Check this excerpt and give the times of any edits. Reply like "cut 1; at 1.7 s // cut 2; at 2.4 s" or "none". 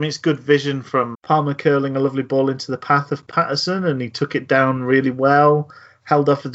cut 1; at 1.1 s